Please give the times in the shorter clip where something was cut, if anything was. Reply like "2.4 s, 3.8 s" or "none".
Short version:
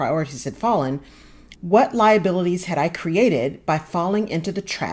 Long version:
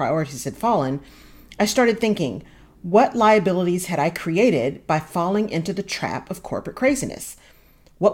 1.5 s